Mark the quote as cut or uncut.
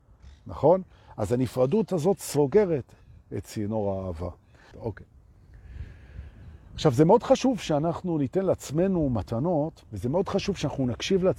cut